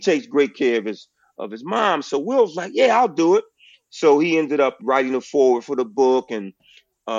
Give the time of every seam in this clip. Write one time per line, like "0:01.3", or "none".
0:04.8